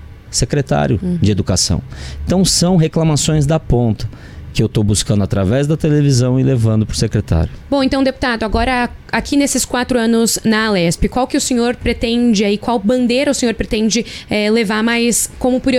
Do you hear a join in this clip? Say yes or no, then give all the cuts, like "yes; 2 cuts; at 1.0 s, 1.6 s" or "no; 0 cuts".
no; 0 cuts